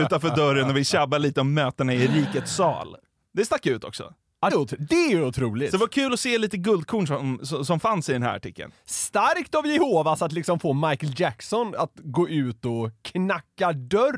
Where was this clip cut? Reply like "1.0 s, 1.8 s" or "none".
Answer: 4.5 s